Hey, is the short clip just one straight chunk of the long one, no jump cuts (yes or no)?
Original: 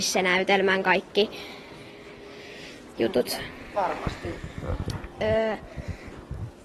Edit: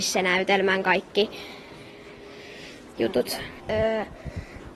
no